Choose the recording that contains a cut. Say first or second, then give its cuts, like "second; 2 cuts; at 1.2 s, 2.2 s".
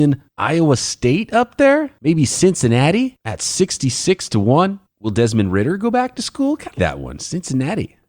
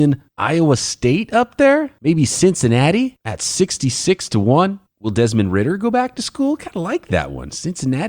first; 1 cut; at 6.7 s